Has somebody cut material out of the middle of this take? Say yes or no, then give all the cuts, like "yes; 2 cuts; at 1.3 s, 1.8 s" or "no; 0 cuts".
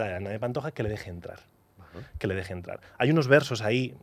no; 0 cuts